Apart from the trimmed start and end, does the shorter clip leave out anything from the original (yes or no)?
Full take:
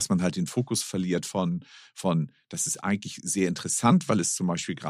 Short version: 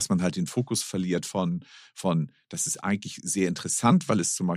no